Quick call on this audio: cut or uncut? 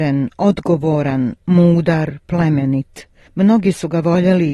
uncut